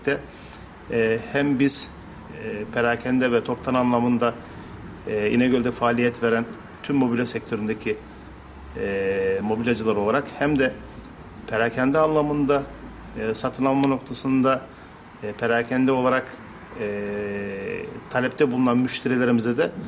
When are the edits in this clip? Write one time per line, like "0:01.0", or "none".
none